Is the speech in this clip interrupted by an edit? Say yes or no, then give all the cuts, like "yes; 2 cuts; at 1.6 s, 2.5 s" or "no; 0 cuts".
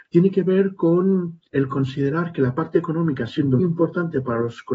yes; 2 cuts; at 1.5 s, 3.6 s